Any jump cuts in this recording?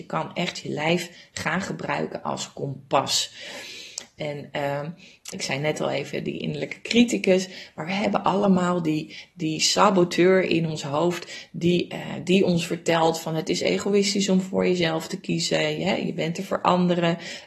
yes; 2 cuts; at 4.2 s, 5.3 s

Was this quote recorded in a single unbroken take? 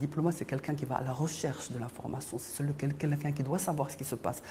yes; 0 cuts

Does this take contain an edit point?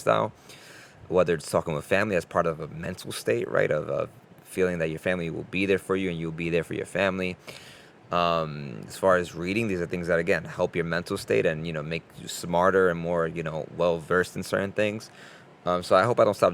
no; 0 cuts

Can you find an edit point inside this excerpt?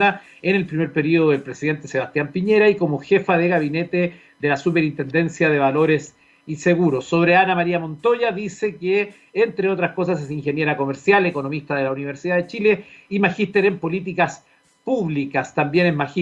no; 0 cuts

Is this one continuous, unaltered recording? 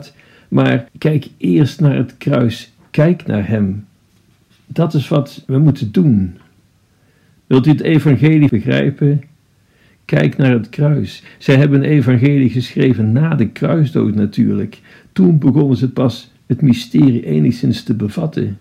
yes; 0 cuts

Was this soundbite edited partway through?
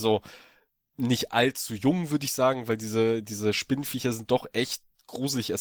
no; 0 cuts

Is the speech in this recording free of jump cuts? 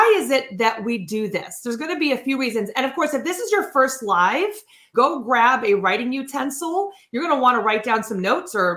no; 1 cut; at 4.9 s

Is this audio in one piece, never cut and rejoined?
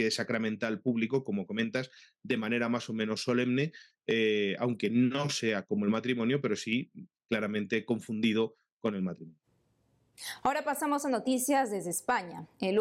yes; 0 cuts

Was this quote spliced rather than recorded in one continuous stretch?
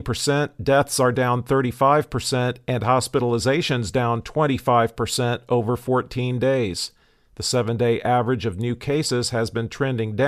no; 0 cuts

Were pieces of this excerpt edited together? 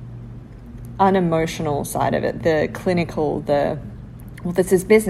no; 0 cuts

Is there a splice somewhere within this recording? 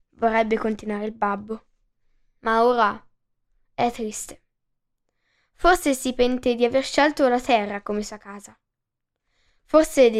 no; 0 cuts

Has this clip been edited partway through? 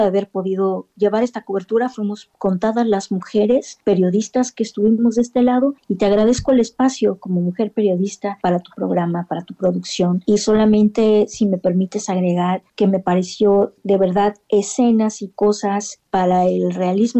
no; 0 cuts

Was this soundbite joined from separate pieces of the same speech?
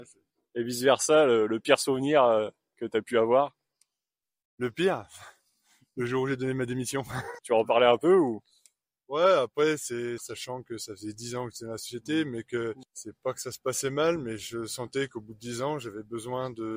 yes; 2 cuts; at 7.4 s, 10.2 s

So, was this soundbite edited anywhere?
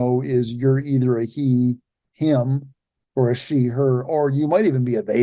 no; 0 cuts

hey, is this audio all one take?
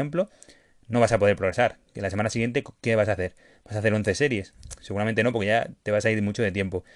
yes; 0 cuts

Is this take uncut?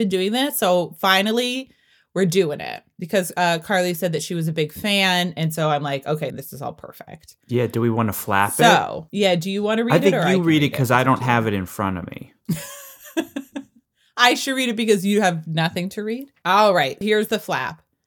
no; 2 cuts; at 6.3 s, 17.0 s

